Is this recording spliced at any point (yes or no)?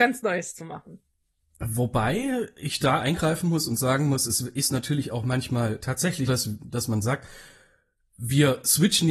yes